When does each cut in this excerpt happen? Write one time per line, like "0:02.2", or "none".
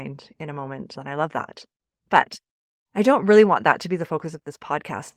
0:00.9